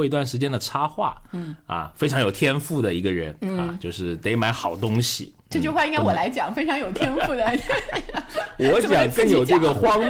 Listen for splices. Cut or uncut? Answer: uncut